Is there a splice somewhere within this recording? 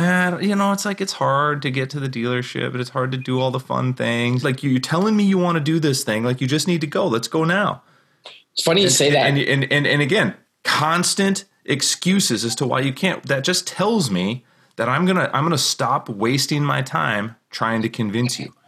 yes; 1 cut; at 4.4 s

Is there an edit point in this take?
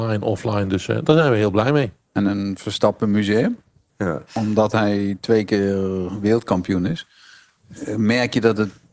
yes; 1 cut; at 3.9 s

